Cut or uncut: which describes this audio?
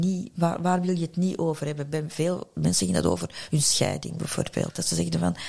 uncut